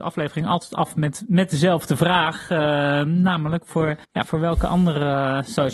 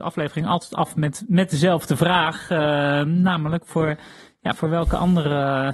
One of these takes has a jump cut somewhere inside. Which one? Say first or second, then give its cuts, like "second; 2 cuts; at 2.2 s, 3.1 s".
first; 1 cut; at 4.0 s